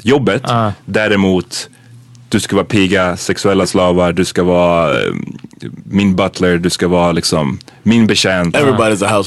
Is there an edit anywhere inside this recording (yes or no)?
no